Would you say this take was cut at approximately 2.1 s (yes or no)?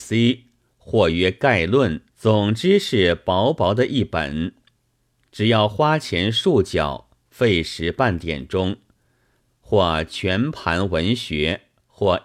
yes